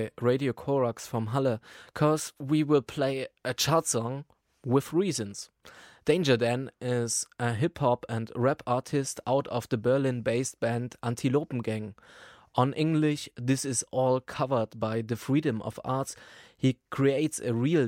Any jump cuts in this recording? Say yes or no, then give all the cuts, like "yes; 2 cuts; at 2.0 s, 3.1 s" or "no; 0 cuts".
yes; 1 cut; at 12.4 s